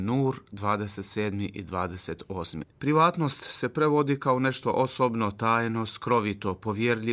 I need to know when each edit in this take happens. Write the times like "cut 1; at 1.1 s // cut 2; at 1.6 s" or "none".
cut 1; at 2.6 s